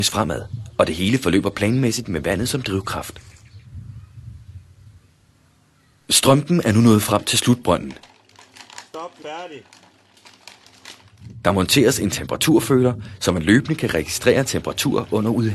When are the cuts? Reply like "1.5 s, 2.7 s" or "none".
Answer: 9.2 s